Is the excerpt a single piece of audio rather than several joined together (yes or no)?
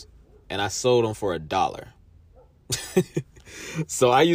yes